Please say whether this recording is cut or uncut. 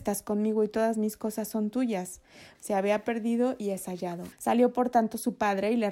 cut